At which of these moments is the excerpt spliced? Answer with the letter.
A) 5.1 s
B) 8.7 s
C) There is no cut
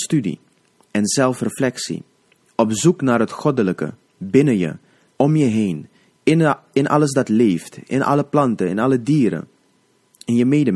A